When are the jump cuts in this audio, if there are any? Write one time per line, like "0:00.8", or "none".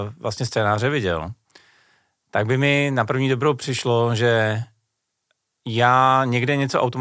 none